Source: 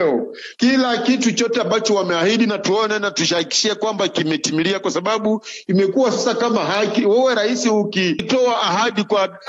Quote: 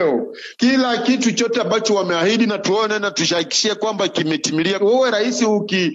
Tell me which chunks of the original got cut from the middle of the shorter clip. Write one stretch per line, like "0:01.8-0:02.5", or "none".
0:04.8-0:07.0